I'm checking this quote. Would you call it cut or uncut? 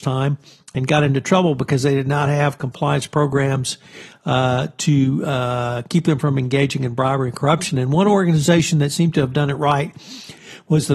uncut